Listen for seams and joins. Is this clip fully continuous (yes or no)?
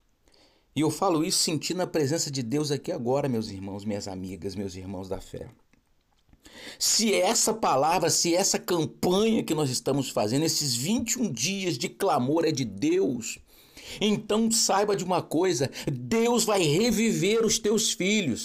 yes